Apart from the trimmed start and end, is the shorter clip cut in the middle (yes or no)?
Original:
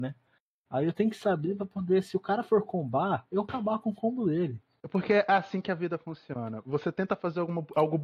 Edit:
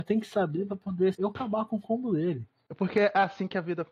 yes